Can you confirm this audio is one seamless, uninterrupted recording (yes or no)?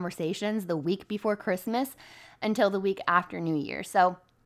yes